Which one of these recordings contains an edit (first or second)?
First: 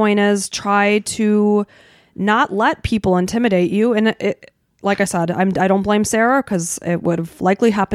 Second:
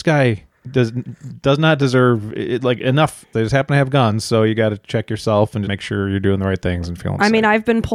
second